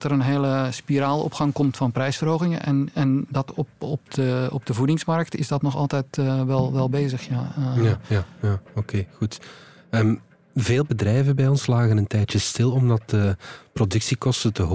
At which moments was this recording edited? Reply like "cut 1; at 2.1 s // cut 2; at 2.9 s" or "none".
none